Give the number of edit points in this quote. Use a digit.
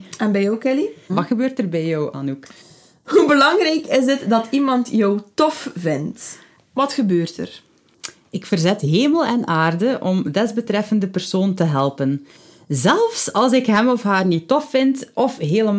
3